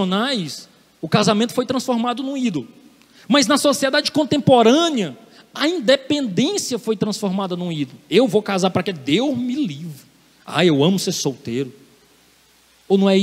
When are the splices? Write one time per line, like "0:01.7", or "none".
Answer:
none